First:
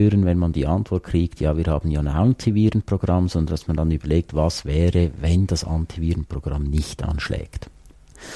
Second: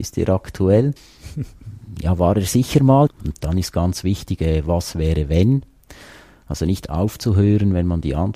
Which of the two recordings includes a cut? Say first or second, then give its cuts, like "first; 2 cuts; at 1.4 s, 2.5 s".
second; 2 cuts; at 1.0 s, 3.1 s